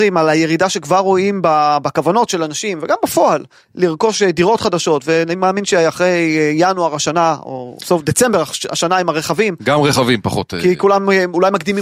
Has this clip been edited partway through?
no; 0 cuts

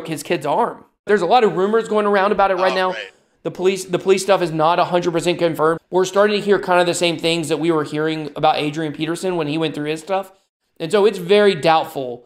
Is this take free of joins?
no; 2 cuts; at 1.1 s, 5.8 s

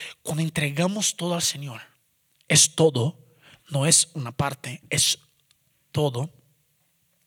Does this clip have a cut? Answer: no; 0 cuts

